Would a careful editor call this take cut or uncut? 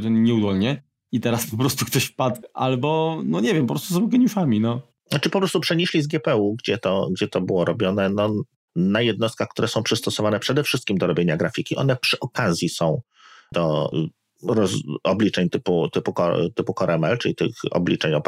uncut